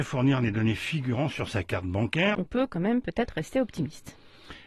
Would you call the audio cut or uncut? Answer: cut